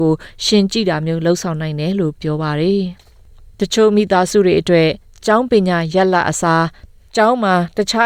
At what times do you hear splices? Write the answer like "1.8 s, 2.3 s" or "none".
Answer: 3.0 s

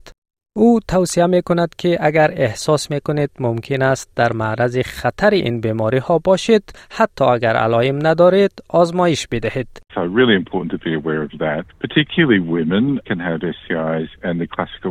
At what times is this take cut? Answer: 9.9 s

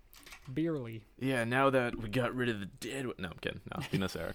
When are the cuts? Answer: 1.1 s

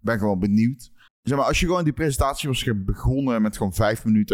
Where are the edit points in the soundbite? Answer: 1.1 s

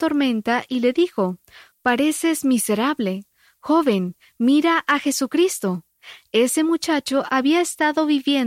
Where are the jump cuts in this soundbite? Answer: 1.7 s

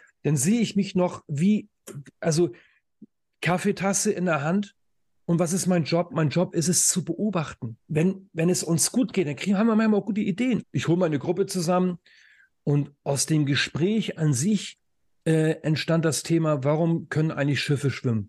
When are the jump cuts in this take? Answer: 7.8 s, 10.6 s

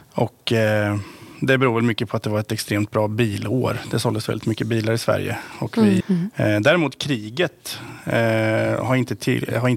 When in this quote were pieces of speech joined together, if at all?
6.0 s

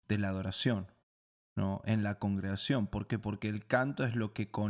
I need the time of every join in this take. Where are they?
none

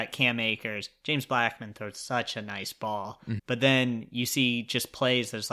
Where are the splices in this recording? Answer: 3.4 s

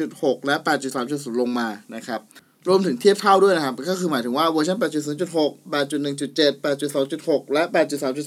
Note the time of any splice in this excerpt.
none

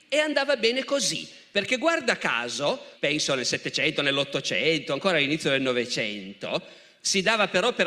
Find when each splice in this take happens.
2.9 s

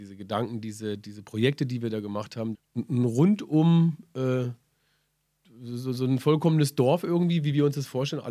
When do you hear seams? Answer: 2.5 s

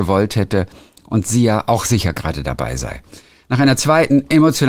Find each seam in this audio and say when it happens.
none

